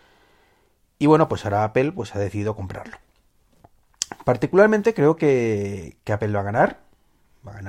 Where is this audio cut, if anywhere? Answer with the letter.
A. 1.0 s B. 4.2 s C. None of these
C